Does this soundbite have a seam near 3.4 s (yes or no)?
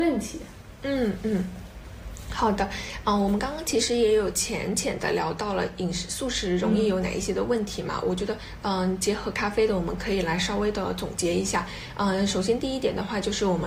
no